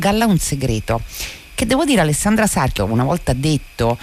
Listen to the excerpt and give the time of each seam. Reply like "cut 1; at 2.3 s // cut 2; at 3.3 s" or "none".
cut 1; at 2.8 s